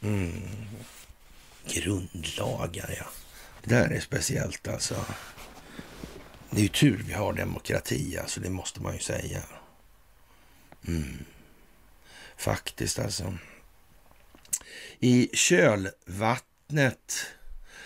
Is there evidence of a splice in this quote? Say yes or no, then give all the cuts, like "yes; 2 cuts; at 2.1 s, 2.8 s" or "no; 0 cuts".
yes; 1 cut; at 3.6 s